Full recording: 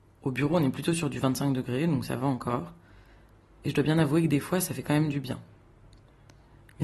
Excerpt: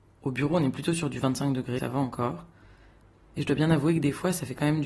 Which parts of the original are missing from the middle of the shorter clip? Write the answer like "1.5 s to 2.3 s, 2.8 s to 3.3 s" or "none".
1.8 s to 2.1 s

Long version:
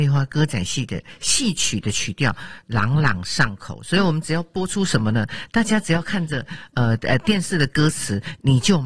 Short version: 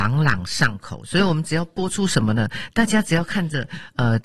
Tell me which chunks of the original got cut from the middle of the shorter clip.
none

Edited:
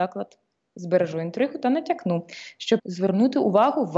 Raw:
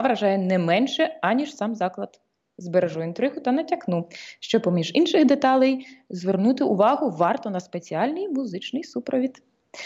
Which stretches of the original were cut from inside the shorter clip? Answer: 4.6 s to 6.0 s

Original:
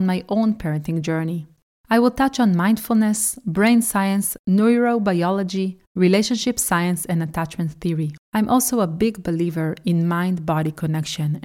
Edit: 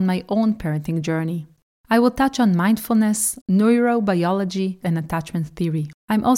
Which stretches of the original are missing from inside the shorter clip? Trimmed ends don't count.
3.4 s to 4.4 s, 5.8 s to 7.1 s

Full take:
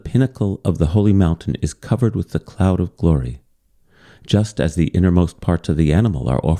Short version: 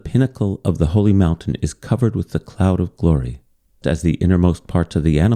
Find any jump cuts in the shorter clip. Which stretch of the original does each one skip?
3.8 s to 4.6 s

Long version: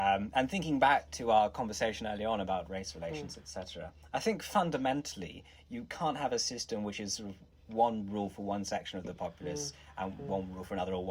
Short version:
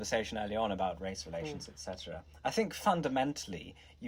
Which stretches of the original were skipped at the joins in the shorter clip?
none

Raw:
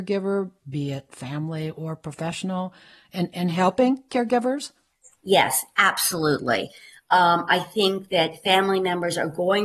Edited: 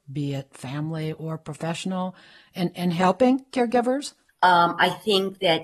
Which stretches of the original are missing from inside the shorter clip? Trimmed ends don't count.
4.9 s to 7.0 s

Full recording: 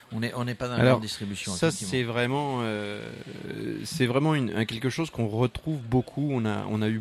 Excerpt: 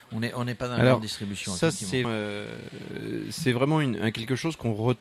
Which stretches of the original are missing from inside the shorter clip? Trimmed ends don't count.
2.0 s to 2.6 s

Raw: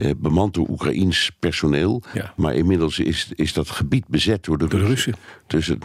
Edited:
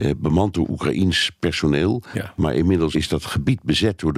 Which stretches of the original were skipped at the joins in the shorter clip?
2.9 s to 3.4 s

